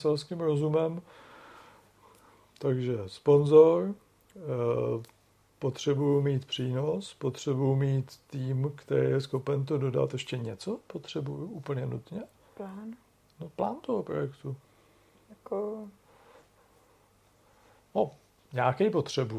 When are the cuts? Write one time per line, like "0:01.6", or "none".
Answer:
0:12.5